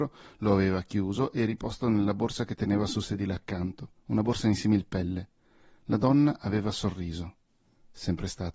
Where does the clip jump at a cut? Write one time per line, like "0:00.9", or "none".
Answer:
none